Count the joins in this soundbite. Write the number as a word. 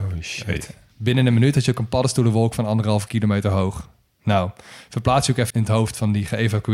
one